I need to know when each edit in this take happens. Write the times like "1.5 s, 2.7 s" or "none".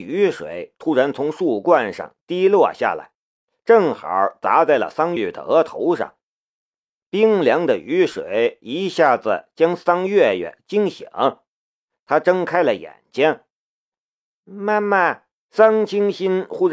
5.2 s, 15.5 s